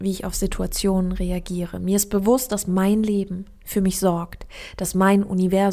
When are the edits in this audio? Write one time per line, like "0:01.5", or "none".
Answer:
none

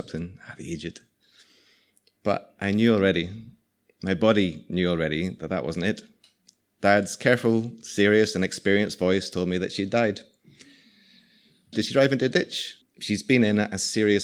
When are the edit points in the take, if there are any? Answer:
0:11.7
0:12.8

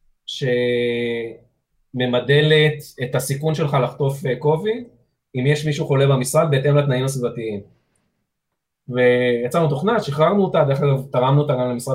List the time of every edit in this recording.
none

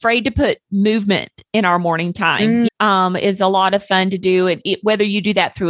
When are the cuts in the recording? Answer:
0:02.7

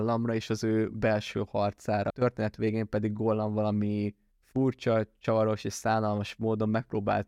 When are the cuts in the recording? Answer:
0:02.1

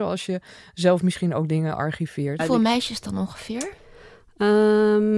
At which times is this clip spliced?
0:02.4

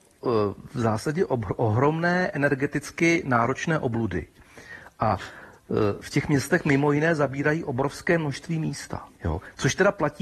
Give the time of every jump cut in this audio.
0:09.1

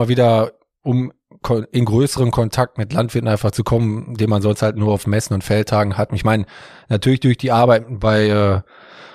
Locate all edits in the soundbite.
none

